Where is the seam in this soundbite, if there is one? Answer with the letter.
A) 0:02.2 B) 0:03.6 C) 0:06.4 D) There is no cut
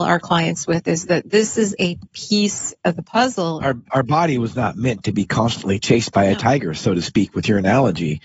B